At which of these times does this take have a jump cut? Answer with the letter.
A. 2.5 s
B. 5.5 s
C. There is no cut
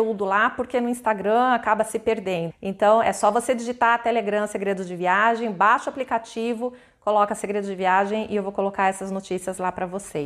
A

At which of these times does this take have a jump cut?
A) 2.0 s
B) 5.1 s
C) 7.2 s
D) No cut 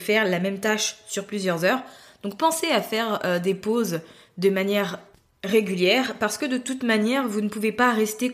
D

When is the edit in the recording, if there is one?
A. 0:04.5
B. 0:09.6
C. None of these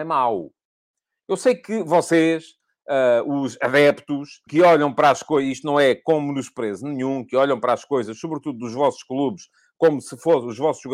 A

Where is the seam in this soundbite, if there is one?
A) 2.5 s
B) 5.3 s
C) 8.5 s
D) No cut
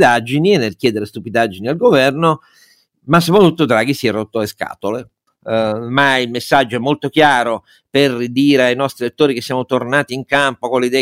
B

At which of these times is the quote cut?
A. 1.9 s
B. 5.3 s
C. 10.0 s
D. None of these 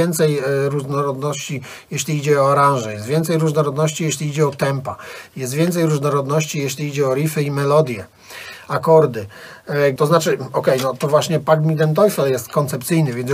C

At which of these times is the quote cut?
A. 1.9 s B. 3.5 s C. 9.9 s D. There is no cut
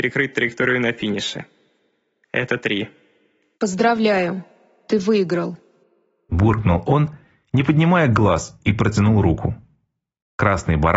B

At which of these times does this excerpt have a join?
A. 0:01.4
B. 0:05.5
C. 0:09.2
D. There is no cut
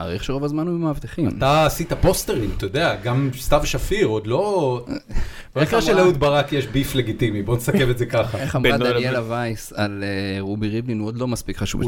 D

